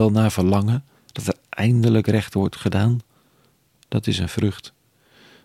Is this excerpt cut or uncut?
uncut